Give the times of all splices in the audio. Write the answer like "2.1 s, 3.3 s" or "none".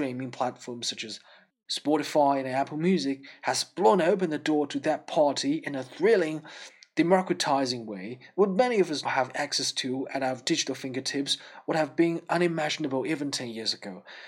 9.1 s